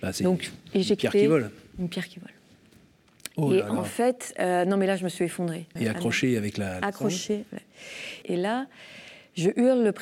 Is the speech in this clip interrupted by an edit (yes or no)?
yes